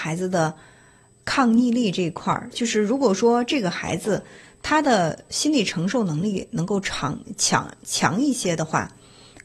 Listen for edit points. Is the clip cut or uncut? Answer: uncut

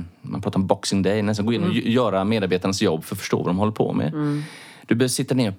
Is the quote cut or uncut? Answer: uncut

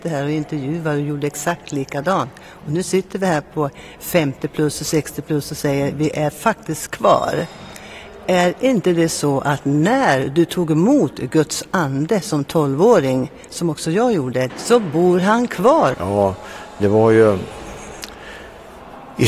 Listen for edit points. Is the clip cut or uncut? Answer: cut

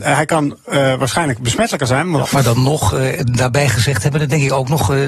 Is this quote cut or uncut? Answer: cut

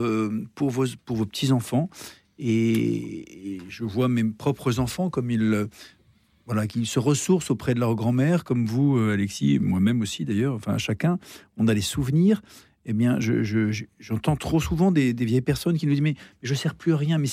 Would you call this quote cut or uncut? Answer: uncut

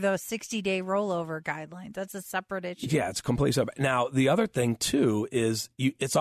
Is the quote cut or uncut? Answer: uncut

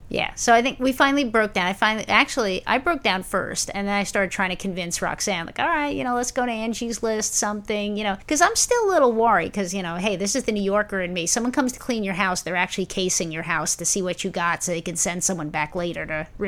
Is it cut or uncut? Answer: uncut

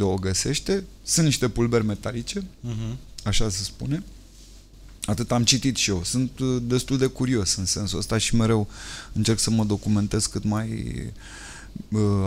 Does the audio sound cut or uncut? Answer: uncut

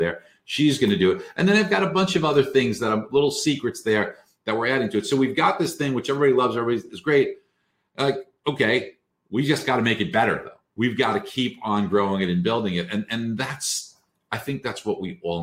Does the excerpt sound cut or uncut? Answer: uncut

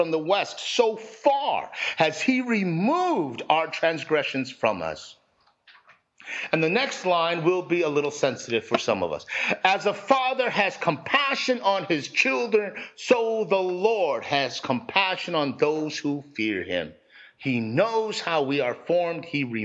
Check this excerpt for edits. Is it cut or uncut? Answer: uncut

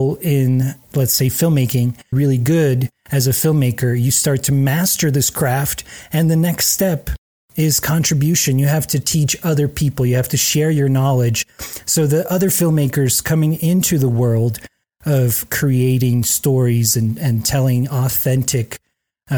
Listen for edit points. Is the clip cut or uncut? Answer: cut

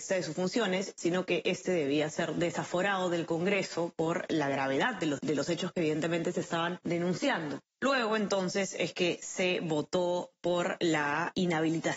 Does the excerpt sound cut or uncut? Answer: cut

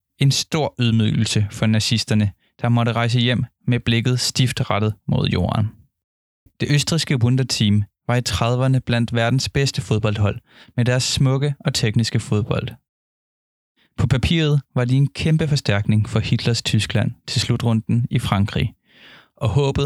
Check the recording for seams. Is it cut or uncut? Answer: cut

